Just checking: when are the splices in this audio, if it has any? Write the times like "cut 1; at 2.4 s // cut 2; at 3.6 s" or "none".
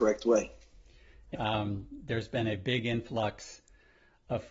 cut 1; at 1.3 s